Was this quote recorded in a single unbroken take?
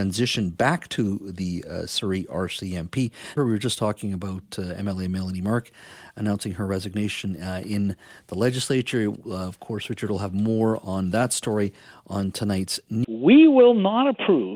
no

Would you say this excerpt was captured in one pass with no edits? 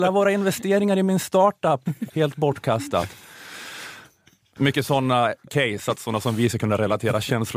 no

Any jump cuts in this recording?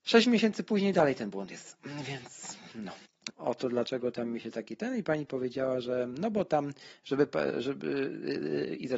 yes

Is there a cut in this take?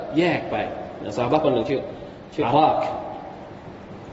yes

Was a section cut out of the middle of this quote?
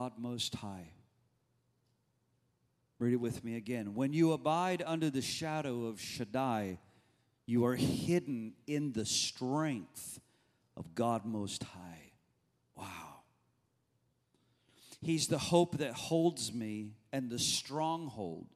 no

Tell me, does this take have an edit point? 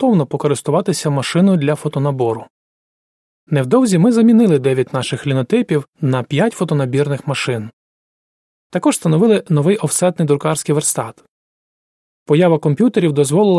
yes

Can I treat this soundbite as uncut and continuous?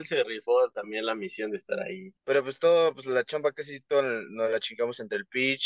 no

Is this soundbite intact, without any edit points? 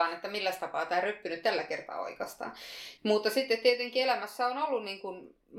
no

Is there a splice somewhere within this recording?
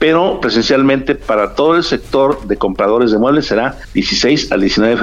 no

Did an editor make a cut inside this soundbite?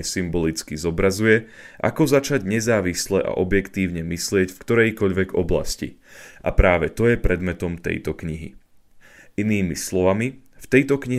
no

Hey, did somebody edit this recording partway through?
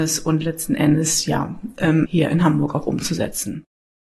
yes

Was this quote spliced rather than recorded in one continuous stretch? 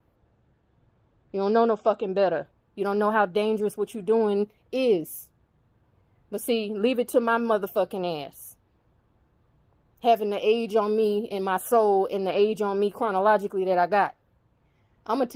no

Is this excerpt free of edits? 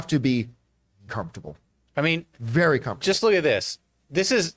no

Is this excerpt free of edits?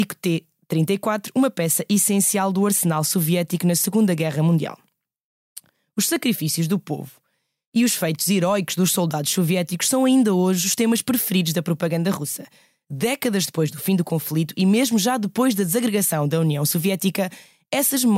yes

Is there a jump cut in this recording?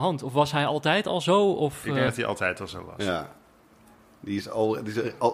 no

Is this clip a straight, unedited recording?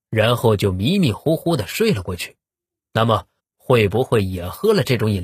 no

